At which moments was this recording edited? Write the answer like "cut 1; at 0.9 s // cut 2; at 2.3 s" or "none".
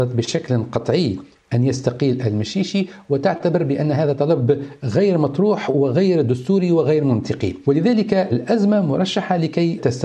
none